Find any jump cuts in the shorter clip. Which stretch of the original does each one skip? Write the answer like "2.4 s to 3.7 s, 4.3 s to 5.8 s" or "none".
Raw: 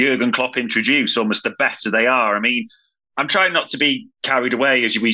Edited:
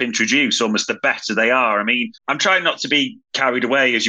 2.7 s to 3.1 s